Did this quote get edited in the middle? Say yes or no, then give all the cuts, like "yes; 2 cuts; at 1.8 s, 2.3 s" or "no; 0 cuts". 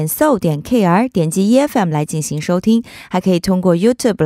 no; 0 cuts